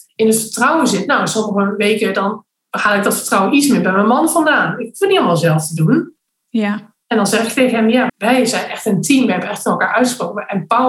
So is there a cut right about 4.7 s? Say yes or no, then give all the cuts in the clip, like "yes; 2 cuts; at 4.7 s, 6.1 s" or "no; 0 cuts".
no; 2 cuts; at 7.0 s, 8.1 s